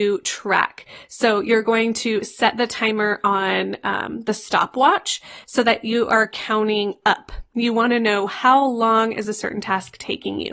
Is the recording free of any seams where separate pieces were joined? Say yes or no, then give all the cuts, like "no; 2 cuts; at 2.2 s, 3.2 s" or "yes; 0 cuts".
yes; 0 cuts